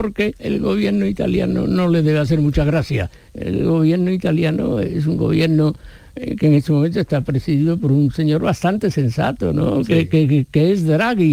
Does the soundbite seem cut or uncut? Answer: uncut